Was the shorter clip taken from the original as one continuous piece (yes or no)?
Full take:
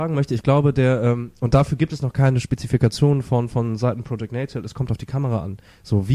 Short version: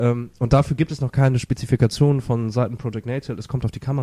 no